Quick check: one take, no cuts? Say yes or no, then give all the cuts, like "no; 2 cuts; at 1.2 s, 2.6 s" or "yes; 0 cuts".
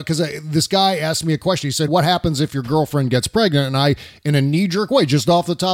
no; 1 cut; at 1.9 s